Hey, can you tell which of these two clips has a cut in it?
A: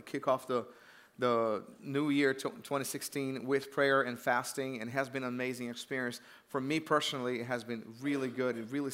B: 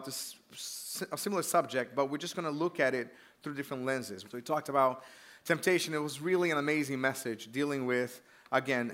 B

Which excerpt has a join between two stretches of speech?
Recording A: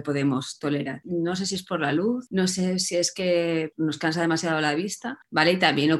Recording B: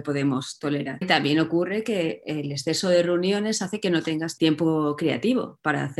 B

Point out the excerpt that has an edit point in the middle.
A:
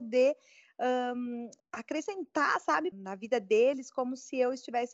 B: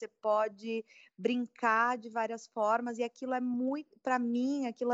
A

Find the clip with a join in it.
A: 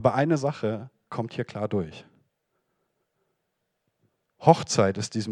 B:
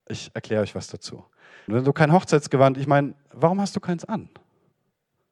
B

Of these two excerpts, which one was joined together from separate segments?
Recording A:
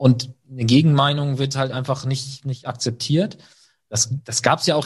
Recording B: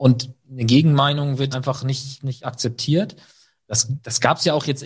B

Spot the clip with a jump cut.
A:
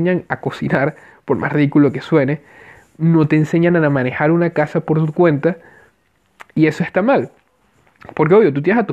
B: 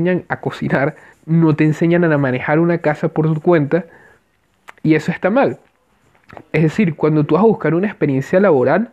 B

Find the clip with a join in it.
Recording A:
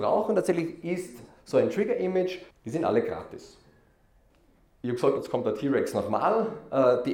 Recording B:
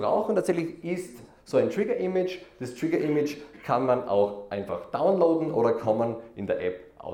A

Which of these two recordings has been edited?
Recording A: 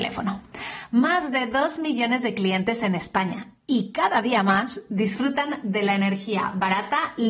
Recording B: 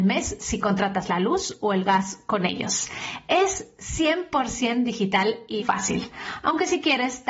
B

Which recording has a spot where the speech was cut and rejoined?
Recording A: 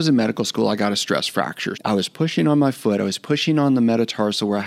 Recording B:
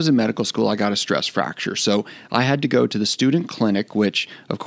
A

